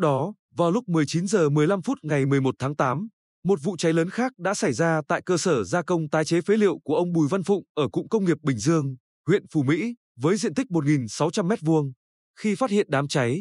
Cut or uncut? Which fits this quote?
uncut